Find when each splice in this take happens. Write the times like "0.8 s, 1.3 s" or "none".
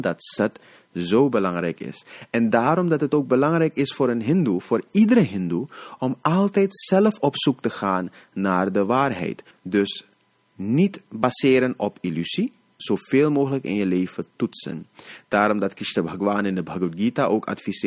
9.5 s, 12.8 s